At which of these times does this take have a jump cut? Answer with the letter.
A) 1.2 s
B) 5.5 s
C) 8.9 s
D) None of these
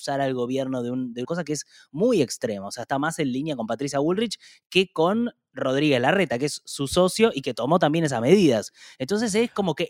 A